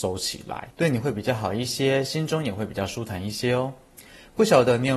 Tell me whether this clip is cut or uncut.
uncut